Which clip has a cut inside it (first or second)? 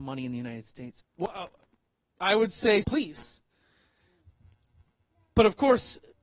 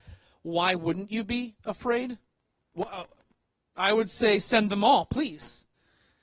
first